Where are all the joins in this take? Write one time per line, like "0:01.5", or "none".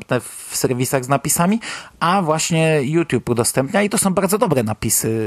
none